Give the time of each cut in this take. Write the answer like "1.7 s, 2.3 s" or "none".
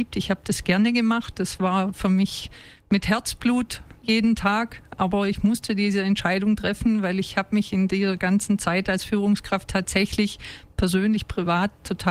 none

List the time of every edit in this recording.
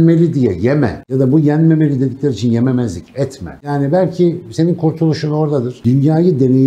3.6 s

